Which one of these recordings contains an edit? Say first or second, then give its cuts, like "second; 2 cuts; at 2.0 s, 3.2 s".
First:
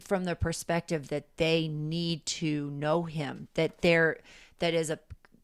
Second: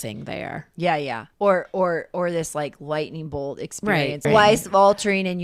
second; 2 cuts; at 1.3 s, 4.2 s